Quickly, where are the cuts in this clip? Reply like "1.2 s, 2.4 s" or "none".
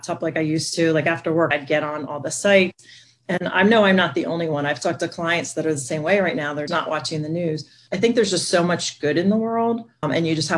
1.5 s, 6.7 s